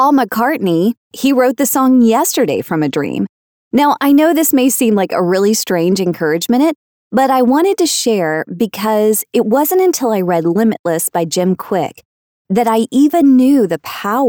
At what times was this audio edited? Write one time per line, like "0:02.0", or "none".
0:01.0